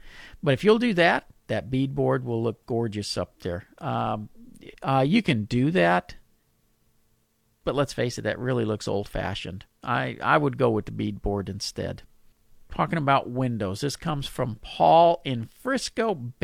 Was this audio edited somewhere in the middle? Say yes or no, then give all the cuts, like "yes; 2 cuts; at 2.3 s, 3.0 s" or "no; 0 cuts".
yes; 1 cut; at 4.7 s